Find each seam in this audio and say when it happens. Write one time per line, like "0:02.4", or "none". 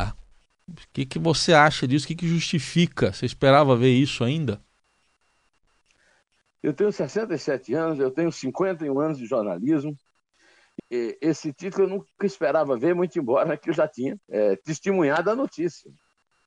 0:10.8
0:14.2